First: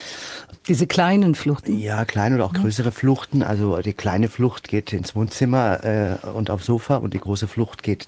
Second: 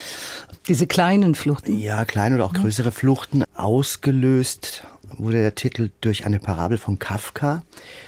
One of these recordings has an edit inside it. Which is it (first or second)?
second